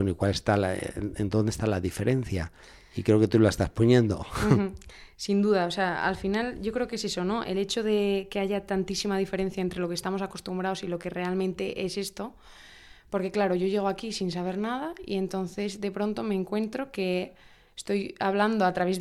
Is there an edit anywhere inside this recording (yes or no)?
no